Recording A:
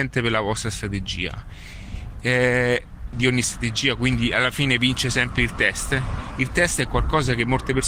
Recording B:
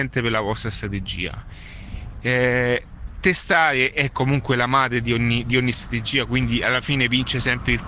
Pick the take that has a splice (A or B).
A